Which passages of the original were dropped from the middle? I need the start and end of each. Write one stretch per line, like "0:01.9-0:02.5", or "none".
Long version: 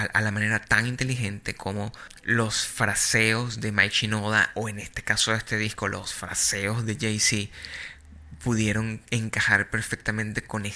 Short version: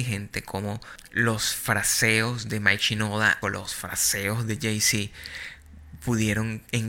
0:04.5-0:05.8